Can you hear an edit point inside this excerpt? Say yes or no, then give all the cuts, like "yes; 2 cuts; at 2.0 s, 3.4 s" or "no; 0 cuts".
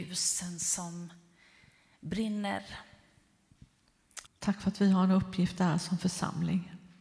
yes; 1 cut; at 4.3 s